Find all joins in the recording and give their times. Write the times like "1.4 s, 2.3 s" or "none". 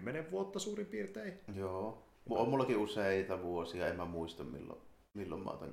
none